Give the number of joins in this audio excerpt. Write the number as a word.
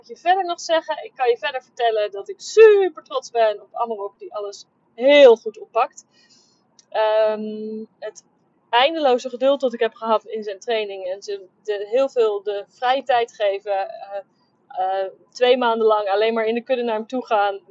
zero